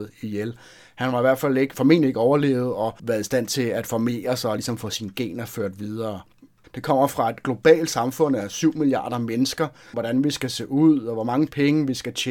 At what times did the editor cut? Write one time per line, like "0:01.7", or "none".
0:06.6
0:09.9